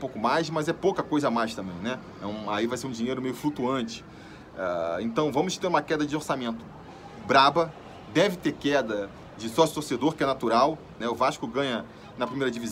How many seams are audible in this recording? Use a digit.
2